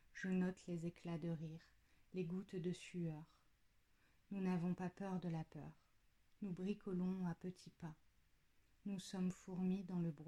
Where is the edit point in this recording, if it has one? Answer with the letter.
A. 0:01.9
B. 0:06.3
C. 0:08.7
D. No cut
A